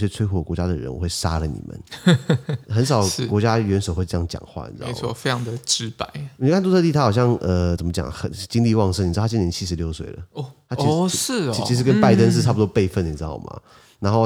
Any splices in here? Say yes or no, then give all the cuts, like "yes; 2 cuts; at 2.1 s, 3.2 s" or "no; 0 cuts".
no; 0 cuts